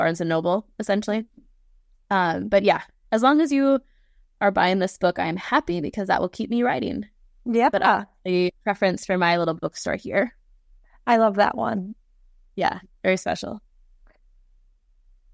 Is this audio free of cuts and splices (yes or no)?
yes